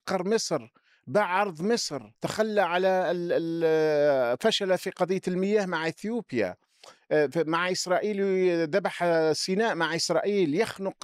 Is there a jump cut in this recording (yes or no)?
yes